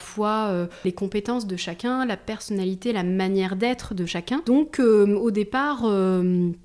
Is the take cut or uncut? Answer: uncut